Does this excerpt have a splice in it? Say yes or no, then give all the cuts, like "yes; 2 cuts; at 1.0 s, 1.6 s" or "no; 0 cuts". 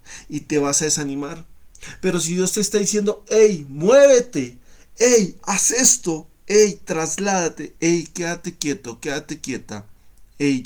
no; 0 cuts